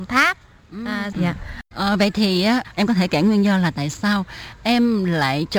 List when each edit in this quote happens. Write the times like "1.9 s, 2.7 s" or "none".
1.1 s